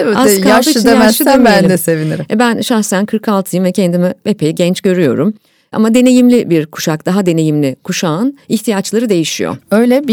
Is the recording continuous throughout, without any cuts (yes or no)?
yes